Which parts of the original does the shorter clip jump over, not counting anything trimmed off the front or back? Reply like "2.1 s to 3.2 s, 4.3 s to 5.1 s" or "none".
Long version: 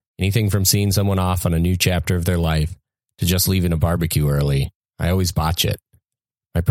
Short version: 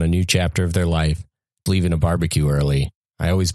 3.2 s to 3.5 s